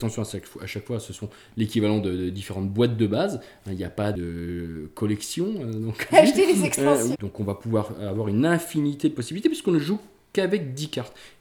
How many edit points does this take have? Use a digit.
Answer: 2